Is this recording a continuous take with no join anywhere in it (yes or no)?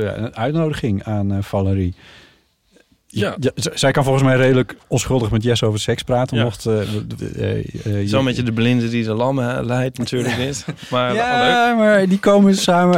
no